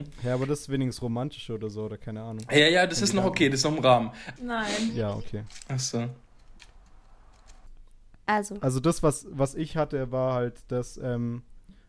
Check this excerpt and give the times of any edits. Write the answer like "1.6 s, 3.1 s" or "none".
4.4 s